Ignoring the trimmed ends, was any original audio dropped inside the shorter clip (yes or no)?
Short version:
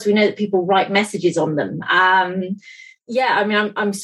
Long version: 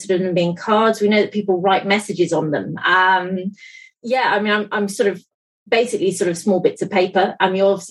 no